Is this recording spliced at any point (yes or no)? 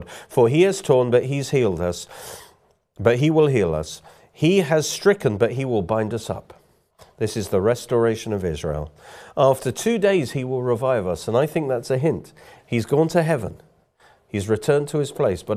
yes